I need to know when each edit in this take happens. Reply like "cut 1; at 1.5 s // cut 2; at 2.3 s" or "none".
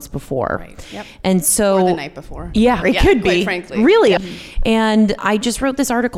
cut 1; at 2.8 s // cut 2; at 4.2 s // cut 3; at 5.2 s